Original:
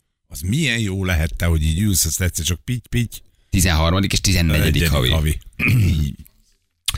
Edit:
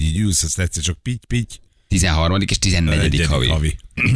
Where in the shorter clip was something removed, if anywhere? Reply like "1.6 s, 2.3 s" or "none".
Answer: none